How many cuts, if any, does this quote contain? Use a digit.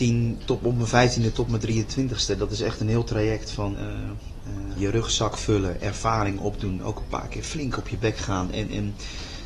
2